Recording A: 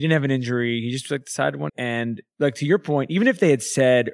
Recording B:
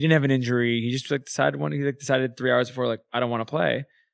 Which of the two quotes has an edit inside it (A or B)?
A